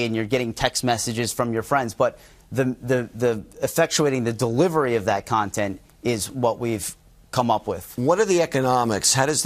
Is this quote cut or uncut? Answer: uncut